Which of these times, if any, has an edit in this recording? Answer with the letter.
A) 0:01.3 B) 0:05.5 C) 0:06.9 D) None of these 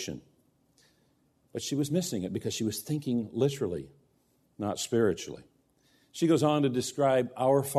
D